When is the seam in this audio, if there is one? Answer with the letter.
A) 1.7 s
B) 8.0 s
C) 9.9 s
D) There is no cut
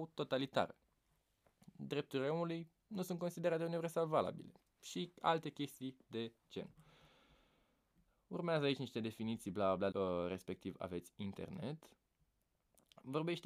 C